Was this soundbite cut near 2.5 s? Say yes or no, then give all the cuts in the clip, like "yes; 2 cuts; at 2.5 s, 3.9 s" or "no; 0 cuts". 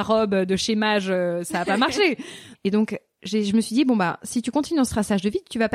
yes; 1 cut; at 2.5 s